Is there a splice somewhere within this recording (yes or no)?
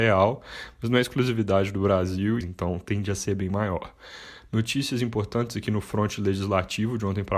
yes